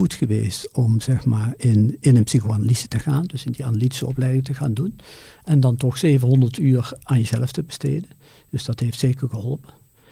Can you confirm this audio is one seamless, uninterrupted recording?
yes; 0 cuts

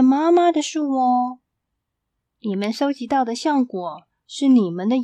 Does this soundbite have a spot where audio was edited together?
no; 0 cuts

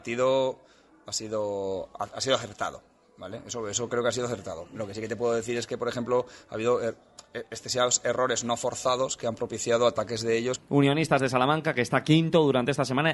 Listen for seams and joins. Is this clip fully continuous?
no; 1 cut; at 10.6 s

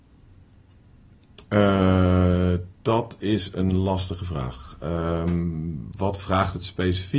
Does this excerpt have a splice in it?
no; 0 cuts

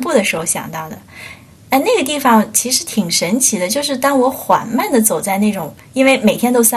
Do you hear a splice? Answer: no; 0 cuts

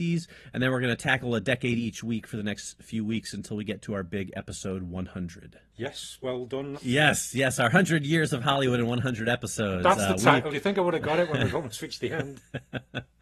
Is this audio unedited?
no; 1 cut; at 6.7 s

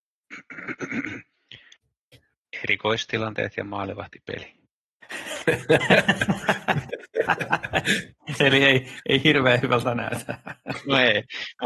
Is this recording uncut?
yes; 0 cuts

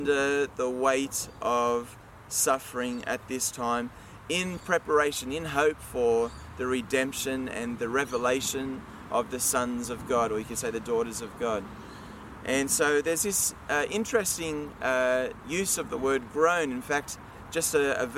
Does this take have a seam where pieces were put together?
no; 0 cuts

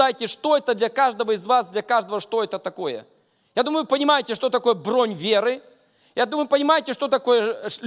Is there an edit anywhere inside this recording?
no; 0 cuts

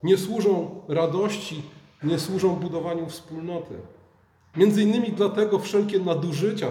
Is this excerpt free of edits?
no; 1 cut; at 4.5 s

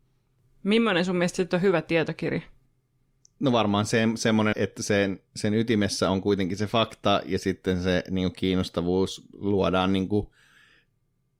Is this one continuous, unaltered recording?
no; 1 cut; at 4.5 s

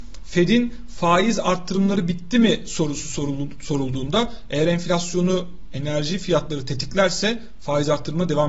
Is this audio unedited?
yes; 0 cuts

